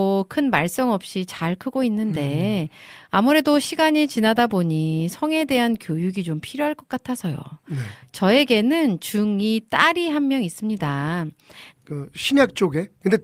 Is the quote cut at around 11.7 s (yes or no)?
yes